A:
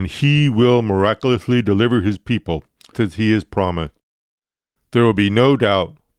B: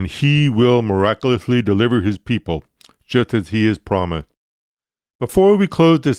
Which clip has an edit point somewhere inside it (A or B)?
A